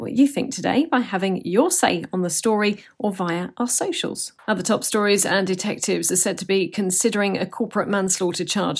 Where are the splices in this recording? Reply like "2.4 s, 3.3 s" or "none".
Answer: 4.4 s